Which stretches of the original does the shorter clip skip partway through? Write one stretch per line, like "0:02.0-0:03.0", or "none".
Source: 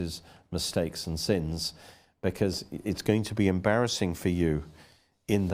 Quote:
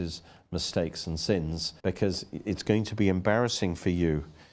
0:01.8-0:02.2